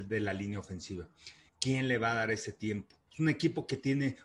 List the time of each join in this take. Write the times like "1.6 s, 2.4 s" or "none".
1.5 s, 3.1 s